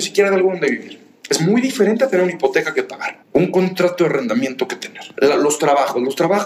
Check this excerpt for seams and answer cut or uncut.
cut